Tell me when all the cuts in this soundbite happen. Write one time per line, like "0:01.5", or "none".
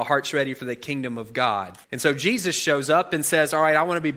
0:01.8